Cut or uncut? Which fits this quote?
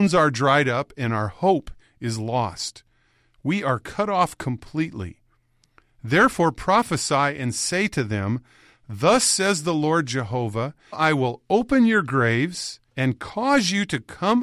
cut